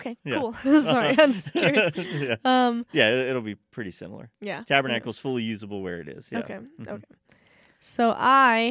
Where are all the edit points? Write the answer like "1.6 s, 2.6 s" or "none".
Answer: none